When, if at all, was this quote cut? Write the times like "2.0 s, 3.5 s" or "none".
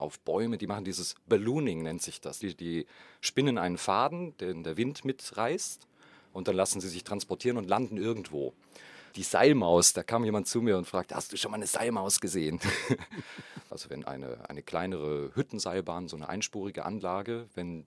2.4 s, 9.1 s, 13.7 s